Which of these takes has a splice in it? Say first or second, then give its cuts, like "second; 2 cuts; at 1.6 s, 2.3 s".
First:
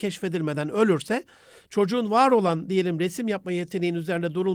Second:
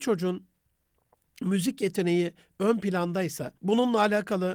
second; 1 cut; at 3.6 s